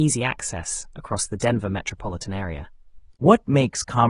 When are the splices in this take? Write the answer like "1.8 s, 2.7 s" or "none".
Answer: none

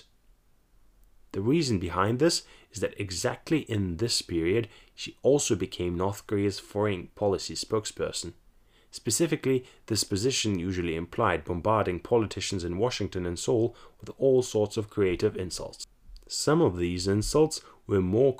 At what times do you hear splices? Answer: none

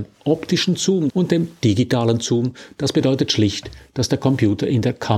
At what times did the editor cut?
1.1 s

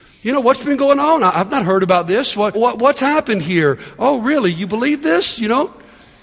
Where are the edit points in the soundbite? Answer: 2.5 s

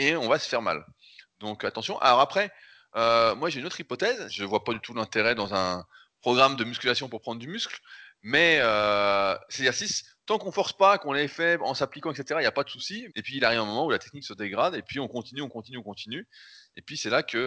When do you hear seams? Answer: 4.3 s, 13.1 s

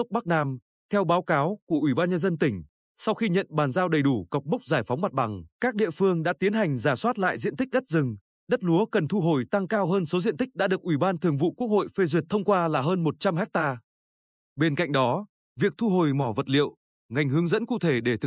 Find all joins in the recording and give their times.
5.5 s, 14.4 s, 16.9 s

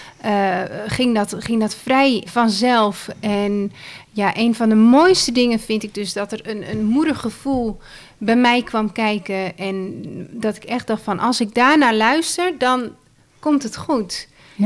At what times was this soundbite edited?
2.2 s

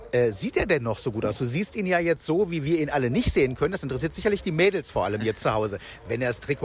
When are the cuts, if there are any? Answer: none

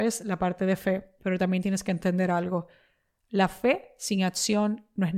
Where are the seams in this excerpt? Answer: none

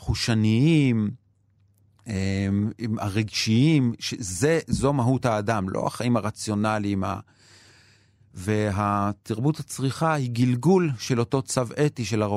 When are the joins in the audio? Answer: none

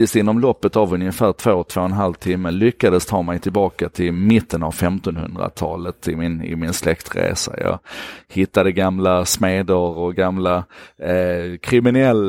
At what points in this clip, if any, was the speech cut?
none

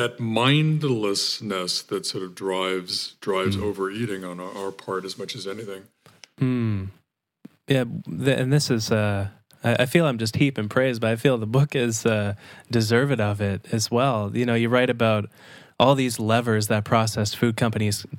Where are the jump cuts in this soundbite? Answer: none

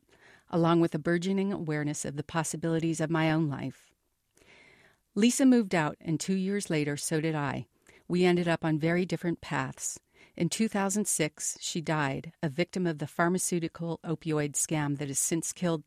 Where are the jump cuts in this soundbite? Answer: none

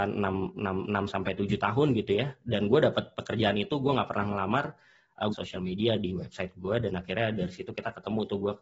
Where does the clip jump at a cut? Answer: 5.3 s

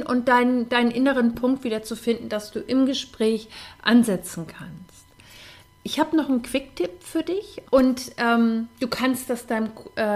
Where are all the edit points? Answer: 7.6 s

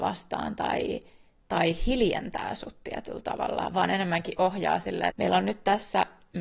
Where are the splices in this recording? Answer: 5.1 s

